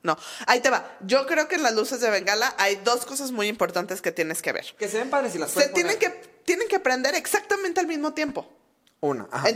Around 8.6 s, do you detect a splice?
no; 0 cuts

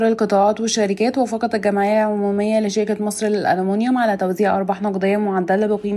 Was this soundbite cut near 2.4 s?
no; 0 cuts

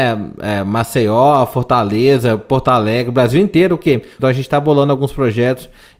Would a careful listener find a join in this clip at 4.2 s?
yes; 1 cut; at 4.2 s

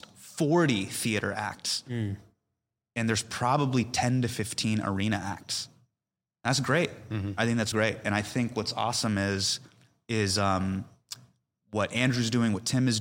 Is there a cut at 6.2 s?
no; 1 cut; at 7.7 s

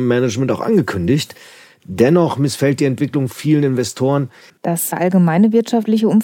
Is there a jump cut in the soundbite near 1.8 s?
no; 1 cut; at 4.5 s

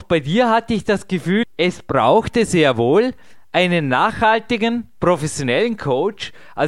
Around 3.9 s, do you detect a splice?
no; 1 cut; at 1.4 s

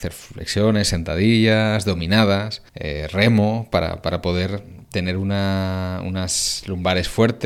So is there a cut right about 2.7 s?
yes; 1 cut; at 2.7 s

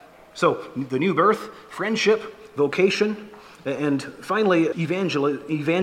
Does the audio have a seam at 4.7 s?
yes; 1 cut; at 4.7 s

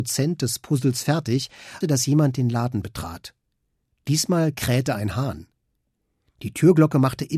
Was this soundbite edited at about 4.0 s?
no; 1 cut; at 1.8 s

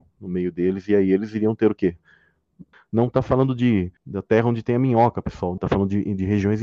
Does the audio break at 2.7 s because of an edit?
yes; 3 cuts; at 2.7 s, 4.0 s, 5.6 s

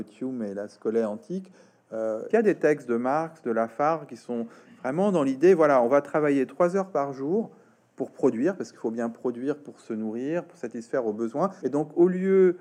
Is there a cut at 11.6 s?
yes; 2 cuts; at 2.3 s, 11.6 s

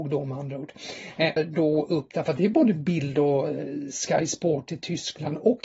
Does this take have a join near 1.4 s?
yes; 1 cut; at 1.4 s

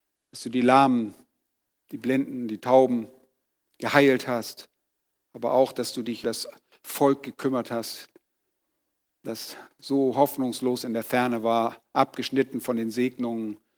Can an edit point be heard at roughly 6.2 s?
yes; 1 cut; at 6.2 s

